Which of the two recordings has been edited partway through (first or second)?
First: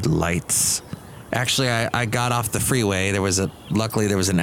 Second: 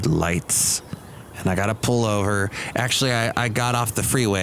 first